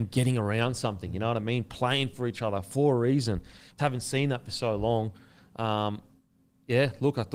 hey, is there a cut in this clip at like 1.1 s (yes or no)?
no